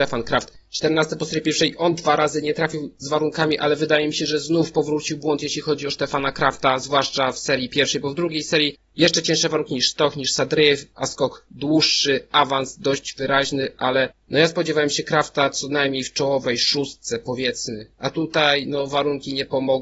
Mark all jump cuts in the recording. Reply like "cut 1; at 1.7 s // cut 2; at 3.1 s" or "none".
none